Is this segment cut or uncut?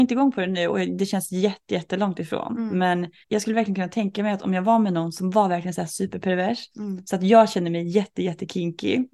cut